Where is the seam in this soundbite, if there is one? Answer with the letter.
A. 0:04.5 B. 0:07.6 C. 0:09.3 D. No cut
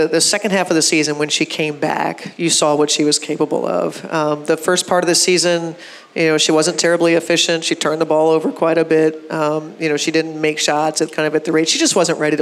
D